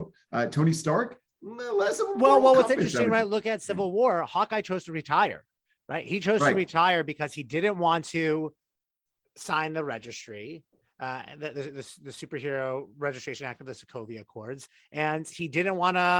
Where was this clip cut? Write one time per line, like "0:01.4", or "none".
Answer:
none